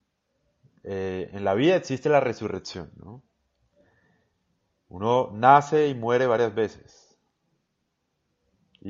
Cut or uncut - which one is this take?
uncut